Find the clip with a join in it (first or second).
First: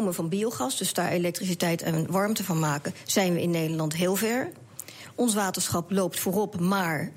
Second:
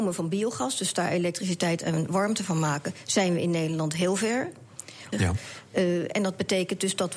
second